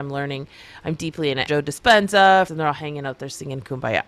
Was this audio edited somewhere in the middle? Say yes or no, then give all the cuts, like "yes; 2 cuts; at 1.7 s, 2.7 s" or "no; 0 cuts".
yes; 2 cuts; at 1.5 s, 2.5 s